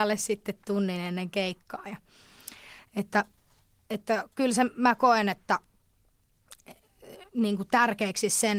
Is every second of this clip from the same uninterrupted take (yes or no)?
yes